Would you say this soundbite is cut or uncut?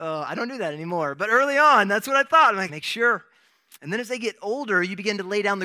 cut